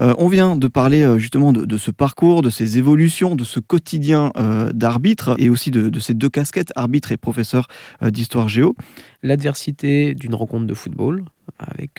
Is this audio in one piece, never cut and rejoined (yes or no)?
no